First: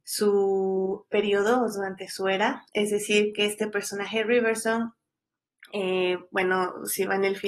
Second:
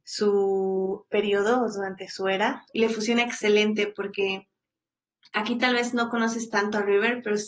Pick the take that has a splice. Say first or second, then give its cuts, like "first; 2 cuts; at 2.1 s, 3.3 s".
second; 1 cut; at 2.7 s